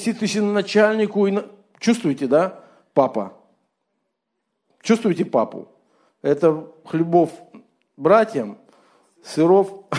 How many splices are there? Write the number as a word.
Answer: zero